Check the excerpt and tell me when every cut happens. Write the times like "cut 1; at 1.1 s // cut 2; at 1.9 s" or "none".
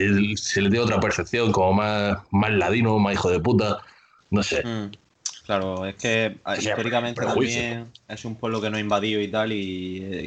none